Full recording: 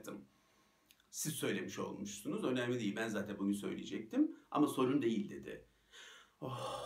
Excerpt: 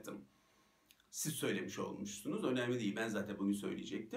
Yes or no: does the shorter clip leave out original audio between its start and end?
no